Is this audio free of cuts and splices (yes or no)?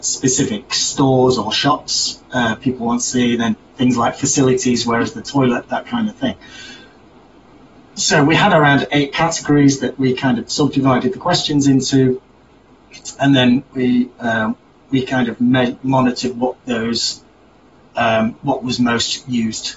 yes